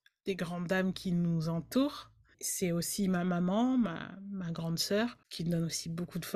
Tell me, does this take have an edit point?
yes; 1 cut; at 2.3 s

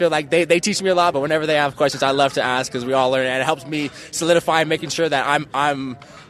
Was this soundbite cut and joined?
no; 0 cuts

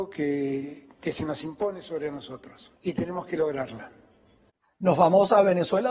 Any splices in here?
yes; 2 cuts; at 0.9 s, 2.8 s

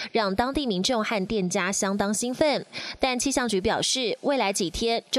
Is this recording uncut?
yes; 0 cuts

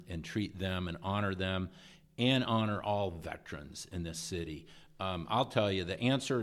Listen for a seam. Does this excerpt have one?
no; 0 cuts

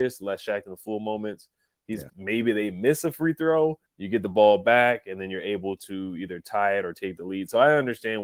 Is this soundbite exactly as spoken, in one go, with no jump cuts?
no; 2 cuts; at 2.1 s, 3.9 s

